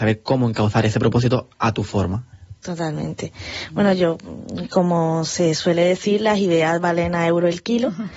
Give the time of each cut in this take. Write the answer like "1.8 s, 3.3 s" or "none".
2.6 s